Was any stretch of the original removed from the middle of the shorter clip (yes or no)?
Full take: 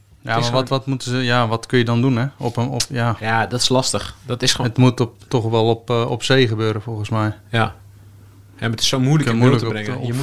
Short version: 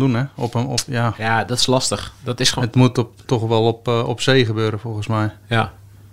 no